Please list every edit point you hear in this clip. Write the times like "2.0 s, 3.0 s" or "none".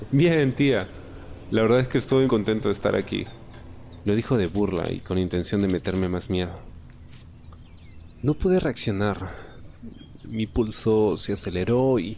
2.3 s, 4.0 s